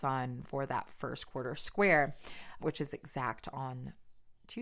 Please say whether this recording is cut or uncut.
cut